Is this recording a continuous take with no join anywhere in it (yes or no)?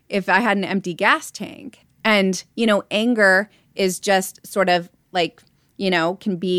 no